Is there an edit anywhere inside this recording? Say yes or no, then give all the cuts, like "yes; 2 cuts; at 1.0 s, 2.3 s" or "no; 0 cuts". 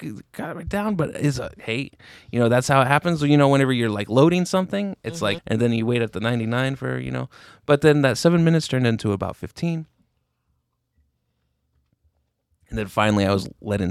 yes; 1 cut; at 5.4 s